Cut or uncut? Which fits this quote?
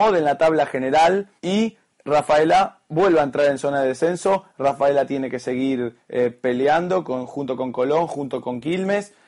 cut